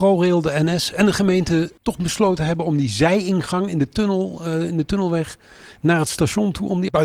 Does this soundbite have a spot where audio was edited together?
yes; 1 cut; at 1.8 s

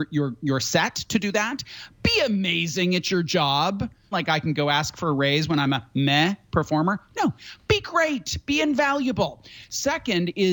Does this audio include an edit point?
yes; 1 cut; at 4.1 s

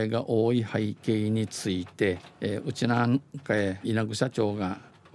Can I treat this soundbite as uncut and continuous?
no; 2 cuts; at 2.3 s, 3.8 s

